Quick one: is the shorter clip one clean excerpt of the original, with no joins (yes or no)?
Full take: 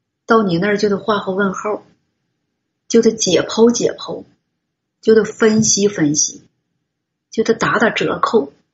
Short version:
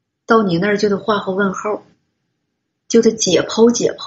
yes